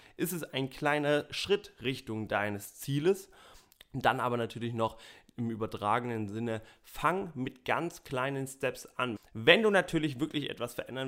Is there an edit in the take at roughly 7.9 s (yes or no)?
no